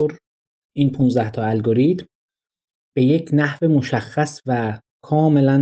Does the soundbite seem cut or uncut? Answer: cut